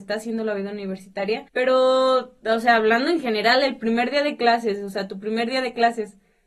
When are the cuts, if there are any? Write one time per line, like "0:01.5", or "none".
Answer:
0:01.5